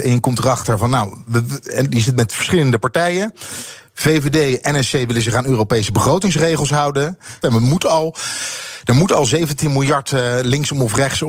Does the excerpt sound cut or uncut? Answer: cut